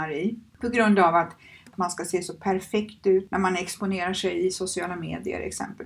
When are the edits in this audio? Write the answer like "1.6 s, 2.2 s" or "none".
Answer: 1.7 s